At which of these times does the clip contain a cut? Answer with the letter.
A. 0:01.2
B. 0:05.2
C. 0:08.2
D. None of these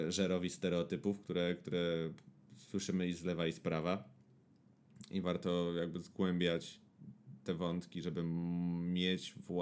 B